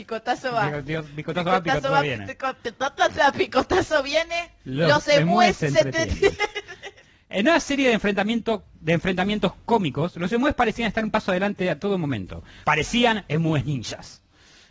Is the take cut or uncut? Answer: cut